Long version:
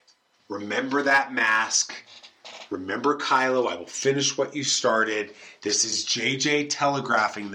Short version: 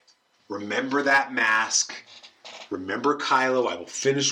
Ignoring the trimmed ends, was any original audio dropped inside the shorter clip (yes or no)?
no